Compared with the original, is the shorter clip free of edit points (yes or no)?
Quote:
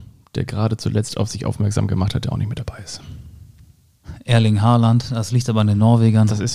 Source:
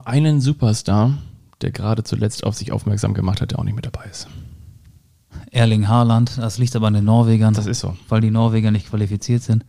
yes